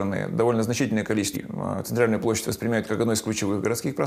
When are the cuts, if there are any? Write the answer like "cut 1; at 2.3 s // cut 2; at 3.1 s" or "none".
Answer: cut 1; at 1.3 s